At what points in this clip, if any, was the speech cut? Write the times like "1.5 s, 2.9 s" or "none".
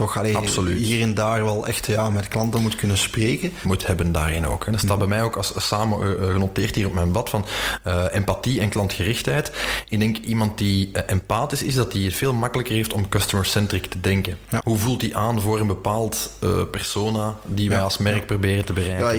3.6 s, 14.6 s